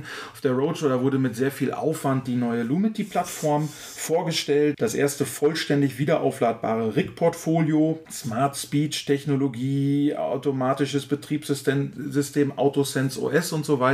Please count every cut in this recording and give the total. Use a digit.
0